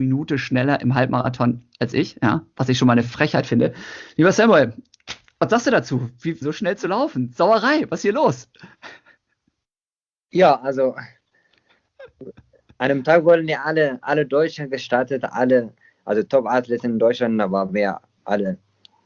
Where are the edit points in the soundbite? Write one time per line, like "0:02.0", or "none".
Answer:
0:06.4